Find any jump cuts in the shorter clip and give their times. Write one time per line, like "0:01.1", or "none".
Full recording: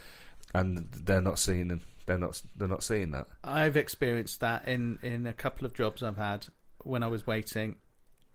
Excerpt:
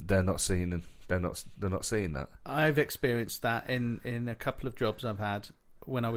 none